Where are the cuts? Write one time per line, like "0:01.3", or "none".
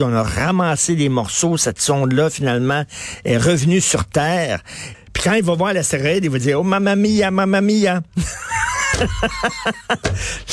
0:04.9